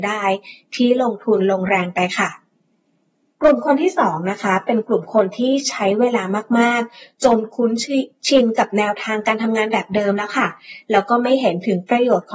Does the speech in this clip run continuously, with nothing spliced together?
yes; 0 cuts

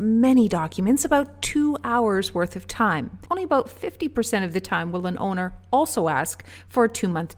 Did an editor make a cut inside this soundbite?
yes; 1 cut; at 3.3 s

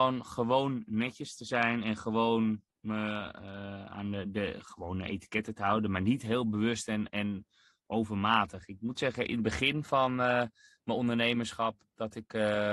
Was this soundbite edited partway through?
no; 0 cuts

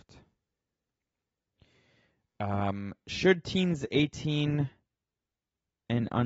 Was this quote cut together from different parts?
no; 0 cuts

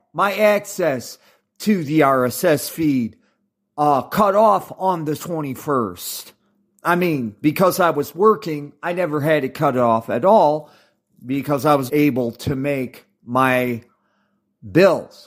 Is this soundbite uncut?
no; 1 cut; at 11.9 s

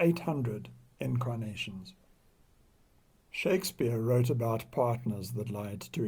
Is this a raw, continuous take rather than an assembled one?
yes; 0 cuts

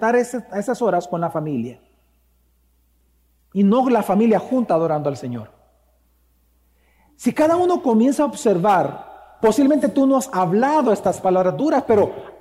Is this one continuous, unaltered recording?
yes; 0 cuts

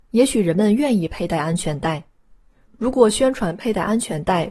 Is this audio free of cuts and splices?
yes; 0 cuts

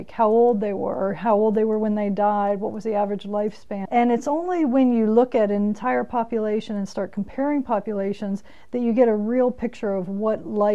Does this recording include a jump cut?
yes; 1 cut; at 3.9 s

